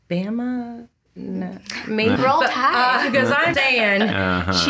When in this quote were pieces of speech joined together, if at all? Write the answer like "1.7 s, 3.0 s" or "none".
2.2 s, 3.5 s